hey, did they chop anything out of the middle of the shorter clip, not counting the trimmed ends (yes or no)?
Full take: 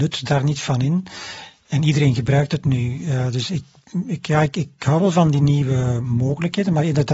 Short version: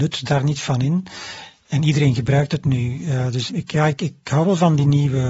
yes